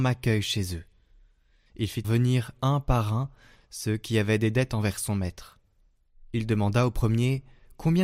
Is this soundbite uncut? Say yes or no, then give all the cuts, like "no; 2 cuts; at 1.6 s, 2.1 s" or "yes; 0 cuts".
no; 1 cut; at 2.0 s